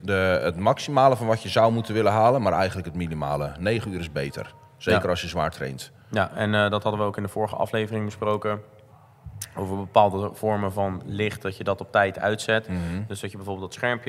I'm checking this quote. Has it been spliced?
no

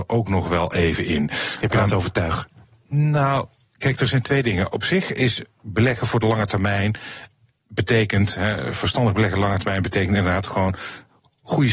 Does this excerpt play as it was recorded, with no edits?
yes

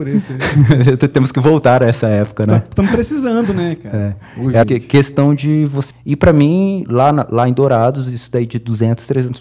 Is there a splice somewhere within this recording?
yes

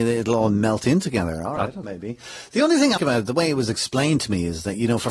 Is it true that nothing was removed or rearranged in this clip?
no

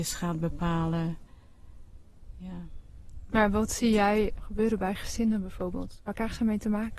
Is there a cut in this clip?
yes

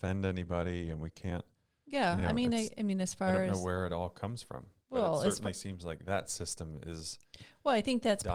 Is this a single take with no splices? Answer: yes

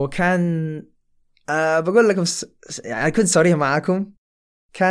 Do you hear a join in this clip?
no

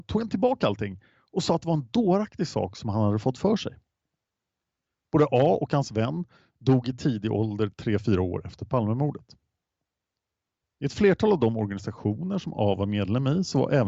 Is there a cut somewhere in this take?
no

